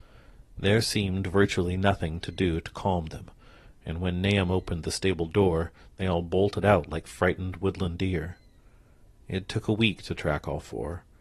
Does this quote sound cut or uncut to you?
uncut